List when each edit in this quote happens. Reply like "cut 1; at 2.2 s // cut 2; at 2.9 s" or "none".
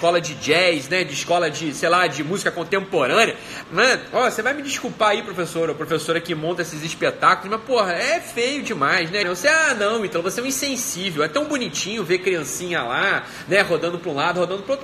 cut 1; at 3.6 s // cut 2; at 9.2 s